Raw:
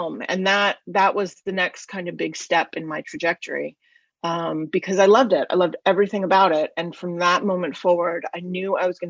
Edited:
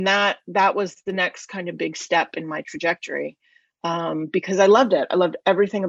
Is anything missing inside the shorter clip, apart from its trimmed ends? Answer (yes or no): no